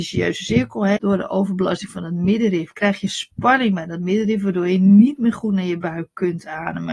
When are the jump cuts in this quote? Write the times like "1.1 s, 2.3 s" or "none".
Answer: 1.0 s